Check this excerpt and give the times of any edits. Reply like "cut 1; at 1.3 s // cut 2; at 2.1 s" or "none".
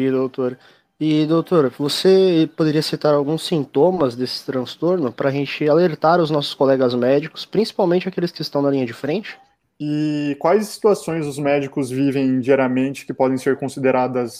cut 1; at 9.6 s